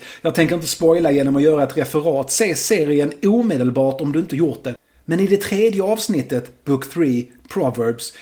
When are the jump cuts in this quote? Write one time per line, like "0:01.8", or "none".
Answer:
none